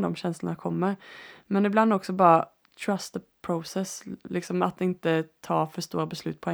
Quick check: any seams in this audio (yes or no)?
no